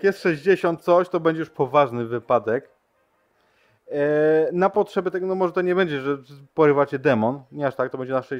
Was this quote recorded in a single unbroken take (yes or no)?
yes